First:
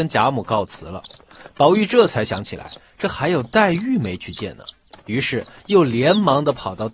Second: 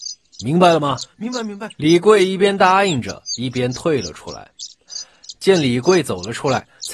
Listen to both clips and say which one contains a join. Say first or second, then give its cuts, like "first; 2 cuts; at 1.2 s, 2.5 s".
second; 2 cuts; at 1.8 s, 5.4 s